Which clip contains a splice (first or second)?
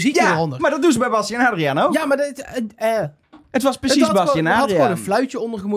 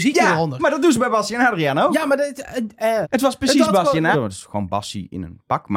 second